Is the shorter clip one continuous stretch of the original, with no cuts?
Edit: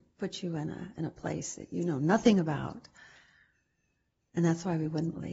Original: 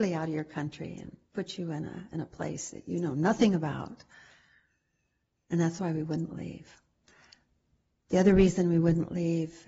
yes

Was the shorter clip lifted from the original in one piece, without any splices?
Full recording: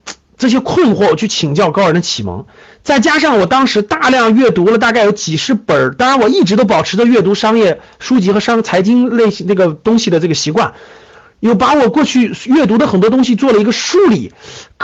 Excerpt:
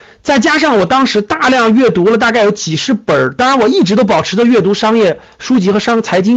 yes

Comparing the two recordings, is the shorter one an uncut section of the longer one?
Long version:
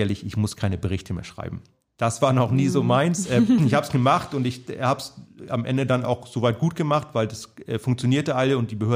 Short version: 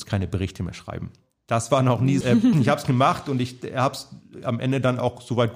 no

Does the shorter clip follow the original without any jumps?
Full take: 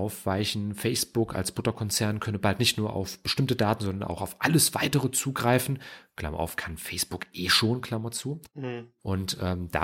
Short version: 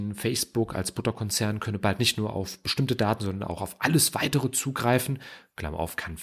yes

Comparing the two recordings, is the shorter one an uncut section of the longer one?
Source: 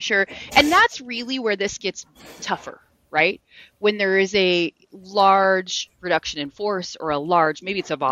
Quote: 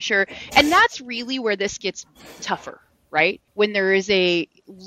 no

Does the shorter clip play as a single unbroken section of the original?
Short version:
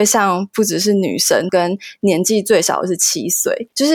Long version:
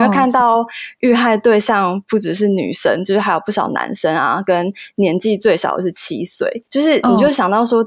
no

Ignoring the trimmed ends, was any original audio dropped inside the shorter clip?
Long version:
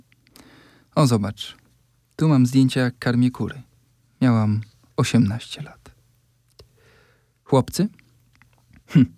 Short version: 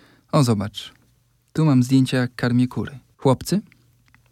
yes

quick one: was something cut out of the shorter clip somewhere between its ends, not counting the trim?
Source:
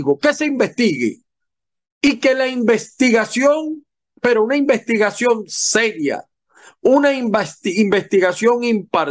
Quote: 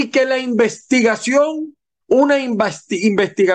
yes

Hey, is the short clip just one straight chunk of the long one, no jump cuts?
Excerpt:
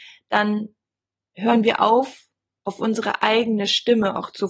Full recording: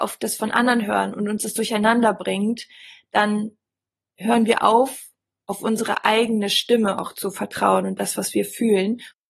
yes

